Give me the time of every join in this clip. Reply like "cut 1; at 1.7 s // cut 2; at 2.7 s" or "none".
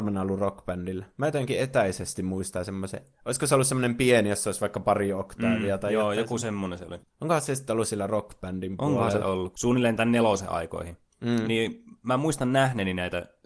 cut 1; at 7.0 s // cut 2; at 9.5 s